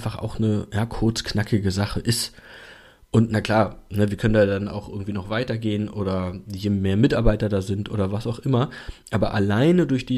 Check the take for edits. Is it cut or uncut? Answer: uncut